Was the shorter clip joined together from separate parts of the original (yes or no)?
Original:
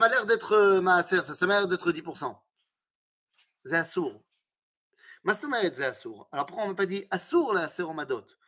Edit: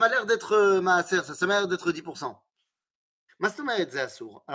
yes